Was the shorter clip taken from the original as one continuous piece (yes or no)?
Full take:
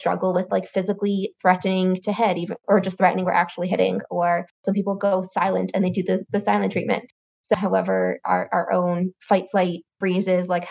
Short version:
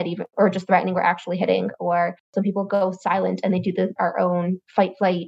no